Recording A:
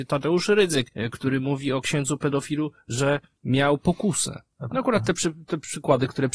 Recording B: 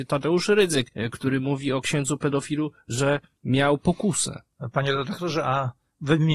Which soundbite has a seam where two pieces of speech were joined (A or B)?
A